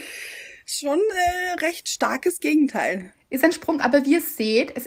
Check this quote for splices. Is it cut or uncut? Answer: uncut